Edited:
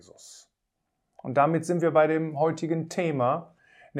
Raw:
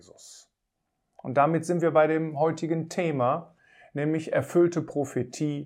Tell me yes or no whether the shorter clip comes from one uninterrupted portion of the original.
yes